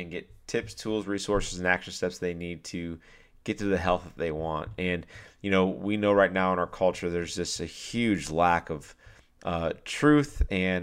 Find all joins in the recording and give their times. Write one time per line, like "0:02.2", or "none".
none